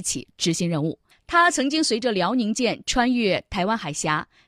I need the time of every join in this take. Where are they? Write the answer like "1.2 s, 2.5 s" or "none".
1.1 s